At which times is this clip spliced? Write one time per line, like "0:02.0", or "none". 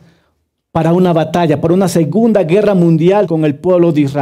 0:03.3